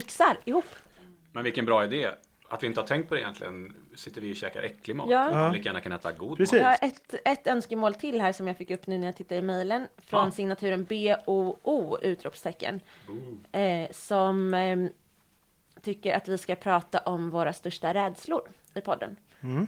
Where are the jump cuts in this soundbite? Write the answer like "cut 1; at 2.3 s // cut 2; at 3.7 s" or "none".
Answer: none